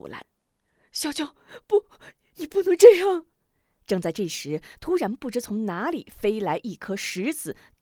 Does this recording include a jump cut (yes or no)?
no